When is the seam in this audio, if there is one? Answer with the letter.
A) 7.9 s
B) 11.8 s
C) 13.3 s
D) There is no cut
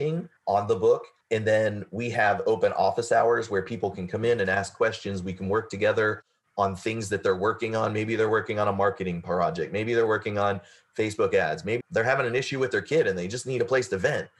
B